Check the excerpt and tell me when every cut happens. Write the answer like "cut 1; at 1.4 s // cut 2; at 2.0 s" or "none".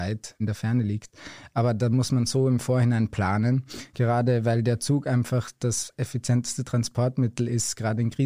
cut 1; at 3.9 s